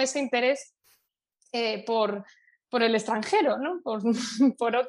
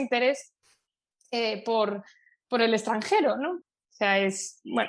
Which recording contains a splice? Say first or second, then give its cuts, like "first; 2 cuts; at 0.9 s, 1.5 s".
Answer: second; 1 cut; at 3.6 s